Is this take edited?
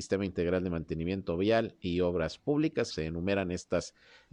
yes; 1 cut; at 2.9 s

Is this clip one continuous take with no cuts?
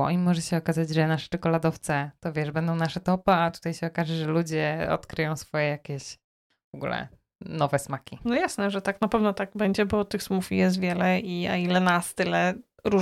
yes; 0 cuts

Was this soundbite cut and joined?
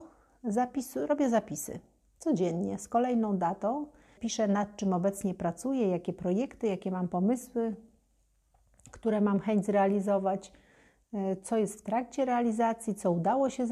yes; 1 cut; at 4.2 s

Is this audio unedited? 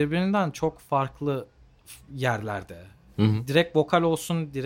yes; 0 cuts

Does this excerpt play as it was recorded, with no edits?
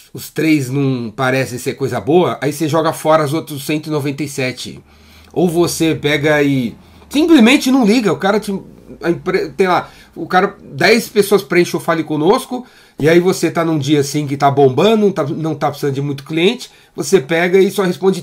yes; 0 cuts

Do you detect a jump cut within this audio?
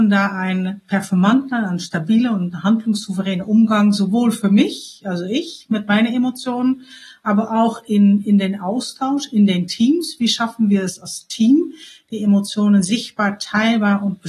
no; 0 cuts

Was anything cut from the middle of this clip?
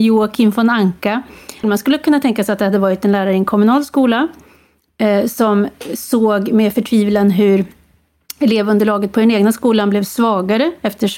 yes; 1 cut; at 1.6 s

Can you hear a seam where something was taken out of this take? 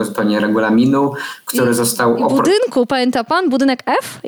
no; 0 cuts

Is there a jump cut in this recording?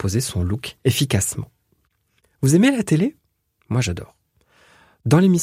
no; 0 cuts

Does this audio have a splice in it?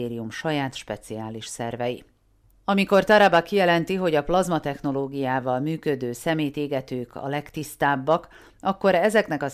no; 0 cuts

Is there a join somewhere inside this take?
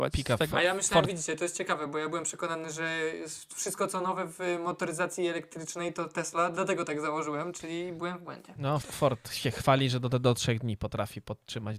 yes; 1 cut; at 8.8 s

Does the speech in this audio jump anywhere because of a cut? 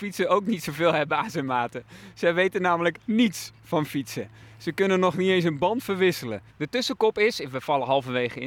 yes; 1 cut; at 6.5 s

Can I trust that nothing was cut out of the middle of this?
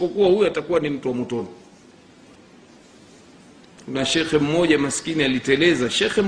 yes; 0 cuts

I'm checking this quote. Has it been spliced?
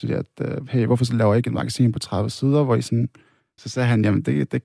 yes; 1 cut; at 3.6 s

